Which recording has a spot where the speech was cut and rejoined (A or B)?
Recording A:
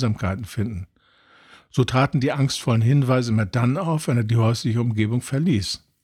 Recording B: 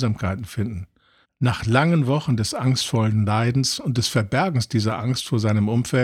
B